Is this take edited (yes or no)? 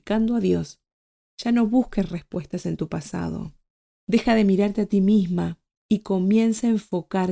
yes